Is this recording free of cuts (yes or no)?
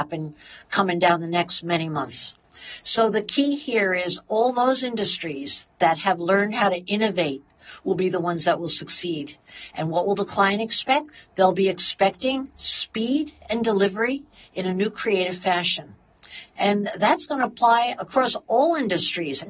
no